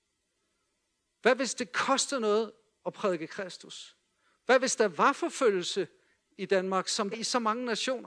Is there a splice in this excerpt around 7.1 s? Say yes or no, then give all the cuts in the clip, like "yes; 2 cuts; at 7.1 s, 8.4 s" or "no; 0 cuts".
yes; 1 cut; at 7.1 s